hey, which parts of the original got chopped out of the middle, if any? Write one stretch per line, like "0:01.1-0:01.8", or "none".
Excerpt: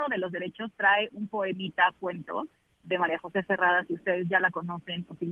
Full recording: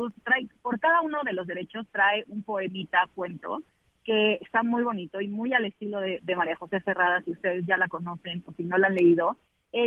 0:04.0-0:06.2